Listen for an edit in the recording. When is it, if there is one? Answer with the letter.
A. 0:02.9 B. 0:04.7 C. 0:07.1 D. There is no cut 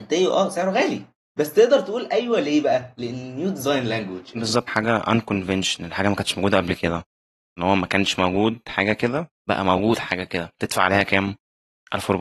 B